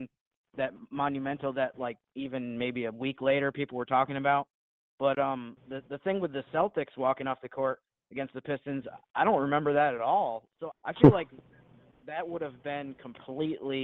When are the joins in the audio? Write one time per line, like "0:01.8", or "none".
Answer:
0:10.7